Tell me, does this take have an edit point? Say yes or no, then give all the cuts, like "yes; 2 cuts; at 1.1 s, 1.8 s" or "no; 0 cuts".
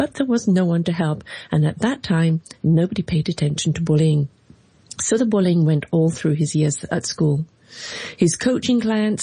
no; 0 cuts